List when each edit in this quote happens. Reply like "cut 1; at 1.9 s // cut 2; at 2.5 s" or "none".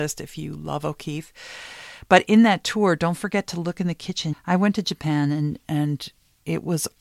cut 1; at 4.3 s // cut 2; at 5.6 s